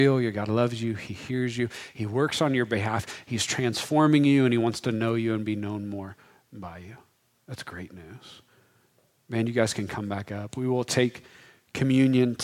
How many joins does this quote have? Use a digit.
0